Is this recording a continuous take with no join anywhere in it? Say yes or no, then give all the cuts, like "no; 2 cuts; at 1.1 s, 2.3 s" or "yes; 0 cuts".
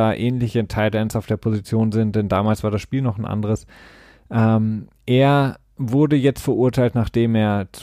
yes; 0 cuts